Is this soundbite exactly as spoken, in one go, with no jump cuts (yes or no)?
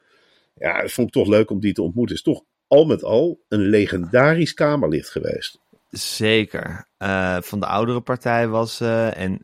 yes